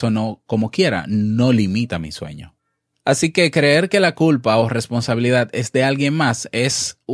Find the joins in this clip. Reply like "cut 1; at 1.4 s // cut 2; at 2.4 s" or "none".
cut 1; at 2.9 s